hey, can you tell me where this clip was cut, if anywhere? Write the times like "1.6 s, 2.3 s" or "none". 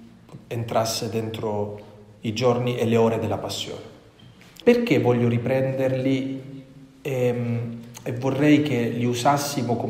4.6 s